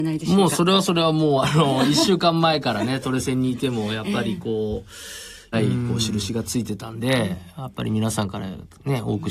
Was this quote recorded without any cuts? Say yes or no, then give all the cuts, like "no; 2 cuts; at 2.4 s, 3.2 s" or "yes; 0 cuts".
no; 1 cut; at 5.5 s